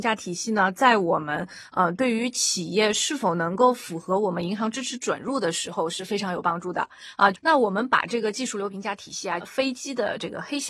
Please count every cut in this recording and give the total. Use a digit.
2